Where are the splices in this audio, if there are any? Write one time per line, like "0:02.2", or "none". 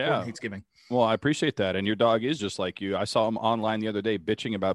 none